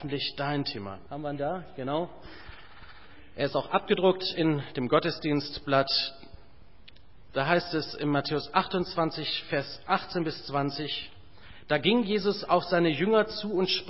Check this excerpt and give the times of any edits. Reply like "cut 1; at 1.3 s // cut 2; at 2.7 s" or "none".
cut 1; at 1.1 s